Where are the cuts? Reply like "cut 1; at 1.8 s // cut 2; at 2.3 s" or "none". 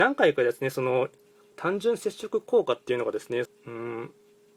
cut 1; at 1.5 s // cut 2; at 3.5 s